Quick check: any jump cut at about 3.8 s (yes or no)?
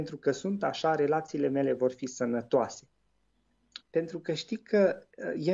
yes